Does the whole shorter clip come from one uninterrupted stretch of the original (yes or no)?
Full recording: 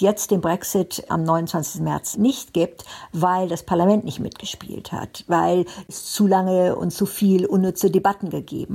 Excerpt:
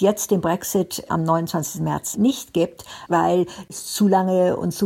no